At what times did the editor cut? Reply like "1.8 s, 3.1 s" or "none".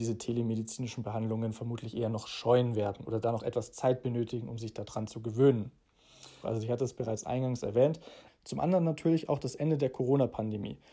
6.4 s, 8.3 s